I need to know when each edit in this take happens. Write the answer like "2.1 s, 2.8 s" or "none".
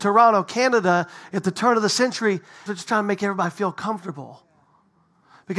2.7 s